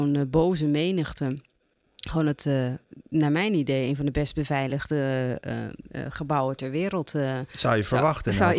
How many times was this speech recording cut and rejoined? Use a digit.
0